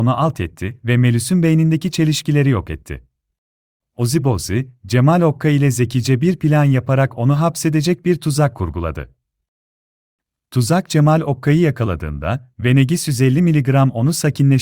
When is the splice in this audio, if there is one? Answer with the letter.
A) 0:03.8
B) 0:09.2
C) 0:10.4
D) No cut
A